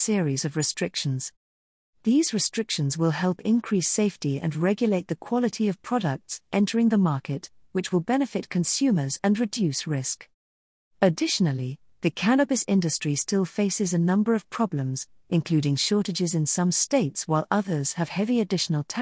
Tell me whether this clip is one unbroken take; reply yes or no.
yes